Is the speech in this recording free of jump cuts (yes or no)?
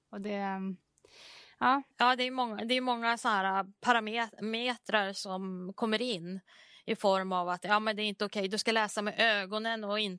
no